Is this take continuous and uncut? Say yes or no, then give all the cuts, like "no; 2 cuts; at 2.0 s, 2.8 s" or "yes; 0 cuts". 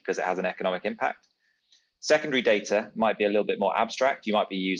yes; 0 cuts